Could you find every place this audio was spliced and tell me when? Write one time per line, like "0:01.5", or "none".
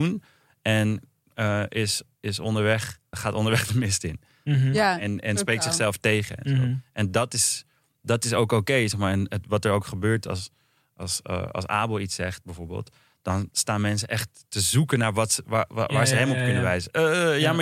0:03.1

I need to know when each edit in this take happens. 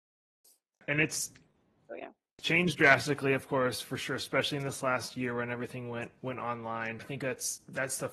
none

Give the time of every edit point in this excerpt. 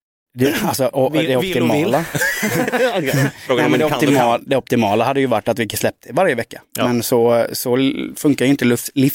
none

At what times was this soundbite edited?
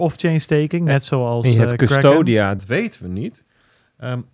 0:02.6

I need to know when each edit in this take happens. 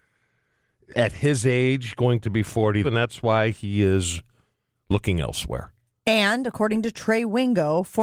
0:00.9
0:02.8

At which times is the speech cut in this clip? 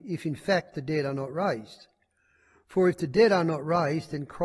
none

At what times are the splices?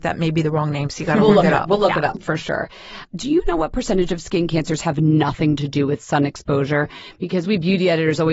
0:03.1

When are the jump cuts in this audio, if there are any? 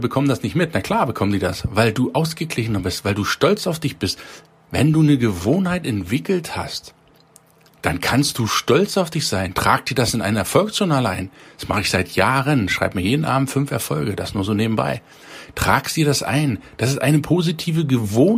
none

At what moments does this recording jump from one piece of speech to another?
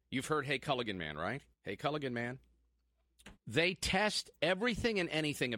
0:01.5
0:03.3

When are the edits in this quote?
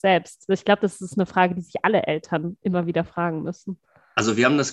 0:02.6

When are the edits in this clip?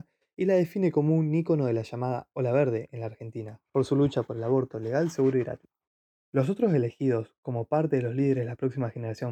none

